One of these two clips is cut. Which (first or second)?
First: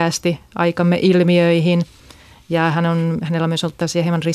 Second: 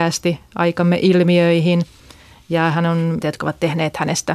second